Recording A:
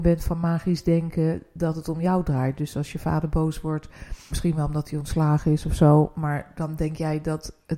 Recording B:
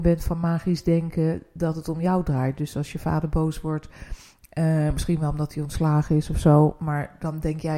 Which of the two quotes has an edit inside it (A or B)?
A